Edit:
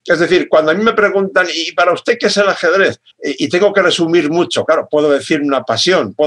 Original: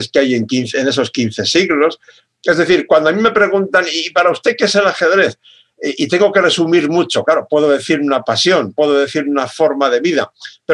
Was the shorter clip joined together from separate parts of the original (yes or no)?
yes